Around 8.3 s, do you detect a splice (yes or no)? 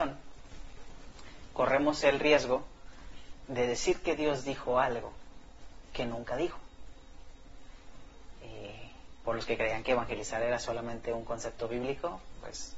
yes